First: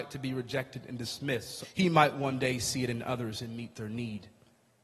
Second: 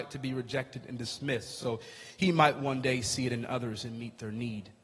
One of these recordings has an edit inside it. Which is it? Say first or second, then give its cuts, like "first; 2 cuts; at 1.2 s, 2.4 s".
first; 1 cut; at 1.6 s